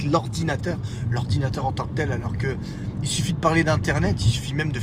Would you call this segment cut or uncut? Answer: uncut